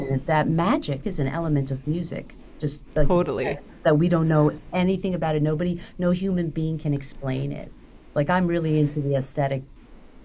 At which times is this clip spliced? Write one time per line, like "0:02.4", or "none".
0:01.0